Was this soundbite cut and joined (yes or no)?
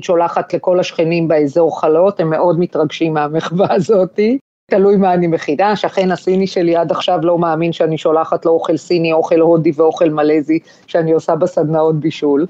no